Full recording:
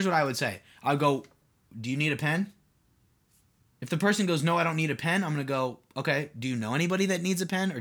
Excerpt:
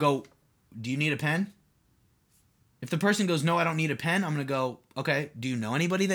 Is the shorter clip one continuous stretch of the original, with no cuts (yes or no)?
yes